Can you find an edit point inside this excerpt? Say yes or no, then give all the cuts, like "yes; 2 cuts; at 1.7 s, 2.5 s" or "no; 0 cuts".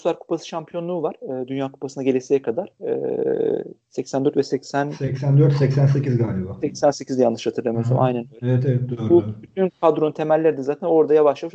no; 0 cuts